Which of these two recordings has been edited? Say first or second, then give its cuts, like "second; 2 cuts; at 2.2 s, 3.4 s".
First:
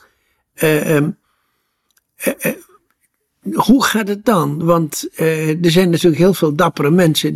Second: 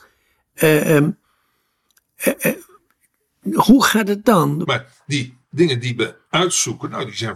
second; 1 cut; at 4.6 s